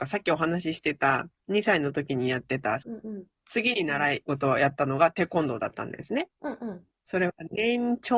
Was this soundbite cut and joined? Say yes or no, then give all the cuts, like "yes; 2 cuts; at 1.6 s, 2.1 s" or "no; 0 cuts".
yes; 1 cut; at 2.8 s